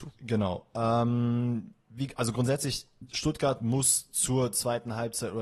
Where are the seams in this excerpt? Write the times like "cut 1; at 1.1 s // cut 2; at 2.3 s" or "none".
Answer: none